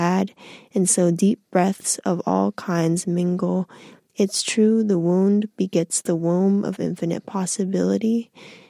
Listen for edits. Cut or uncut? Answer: uncut